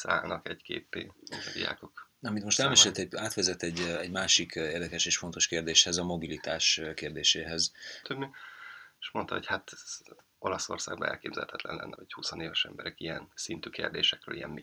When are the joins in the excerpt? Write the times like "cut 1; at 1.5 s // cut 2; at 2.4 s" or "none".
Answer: cut 1; at 8.0 s // cut 2; at 12.0 s